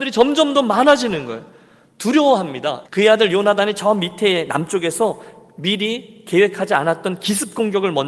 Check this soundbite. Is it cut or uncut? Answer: cut